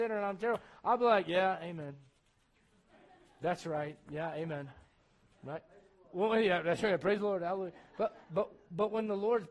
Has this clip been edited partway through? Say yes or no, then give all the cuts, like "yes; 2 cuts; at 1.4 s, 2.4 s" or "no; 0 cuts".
yes; 1 cut; at 8.2 s